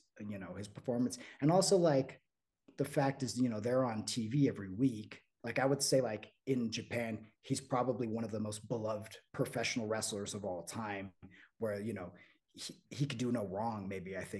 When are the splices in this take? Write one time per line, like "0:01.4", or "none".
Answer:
0:05.4
0:12.8